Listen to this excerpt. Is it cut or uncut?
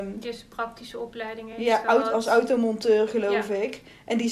uncut